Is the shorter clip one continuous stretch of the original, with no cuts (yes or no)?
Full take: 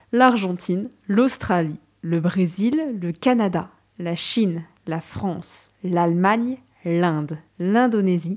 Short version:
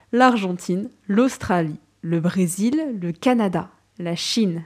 yes